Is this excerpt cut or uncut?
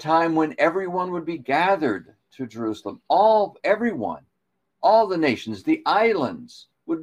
uncut